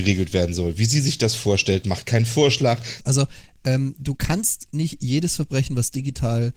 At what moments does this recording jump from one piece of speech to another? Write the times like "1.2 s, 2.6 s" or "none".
3.0 s